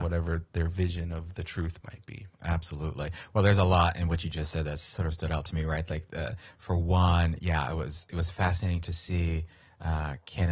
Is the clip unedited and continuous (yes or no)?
yes